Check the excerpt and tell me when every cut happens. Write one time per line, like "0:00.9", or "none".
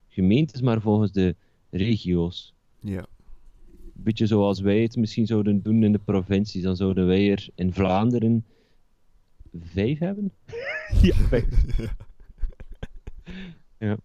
0:10.3